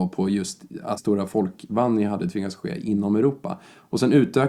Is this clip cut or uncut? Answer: cut